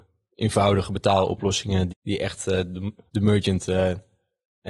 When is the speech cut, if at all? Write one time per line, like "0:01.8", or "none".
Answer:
0:01.9
0:03.1